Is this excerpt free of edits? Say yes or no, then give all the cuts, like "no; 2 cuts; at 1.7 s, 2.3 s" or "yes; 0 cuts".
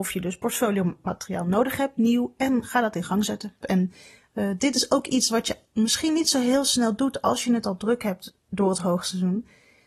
no; 1 cut; at 3.6 s